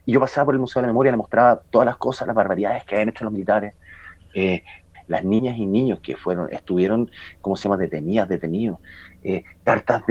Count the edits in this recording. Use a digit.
1